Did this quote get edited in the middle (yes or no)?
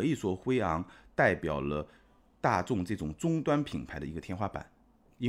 no